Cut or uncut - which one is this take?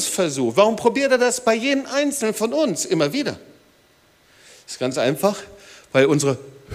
uncut